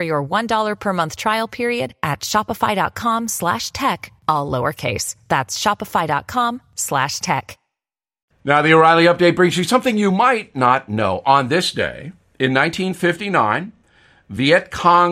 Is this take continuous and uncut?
yes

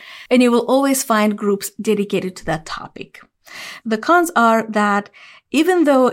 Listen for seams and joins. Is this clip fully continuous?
no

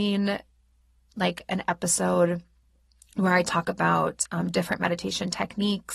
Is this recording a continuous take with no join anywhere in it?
yes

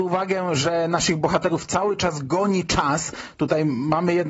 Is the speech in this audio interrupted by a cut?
no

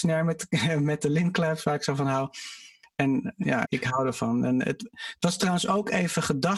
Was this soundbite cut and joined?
yes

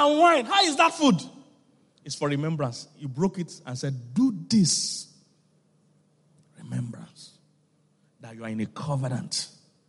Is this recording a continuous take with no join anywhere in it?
yes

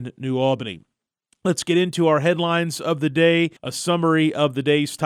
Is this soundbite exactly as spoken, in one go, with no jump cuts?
no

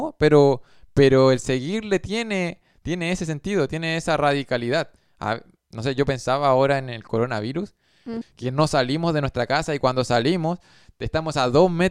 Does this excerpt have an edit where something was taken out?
yes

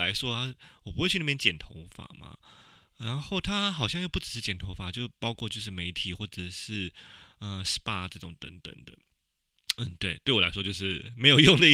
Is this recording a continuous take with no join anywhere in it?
yes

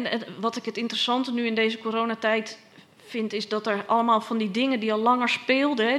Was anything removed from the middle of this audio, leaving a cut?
no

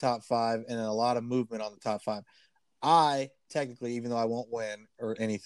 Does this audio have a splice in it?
no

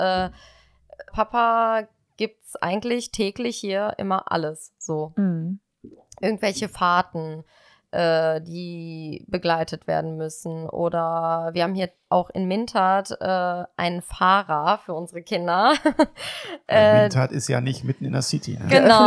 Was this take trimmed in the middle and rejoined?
yes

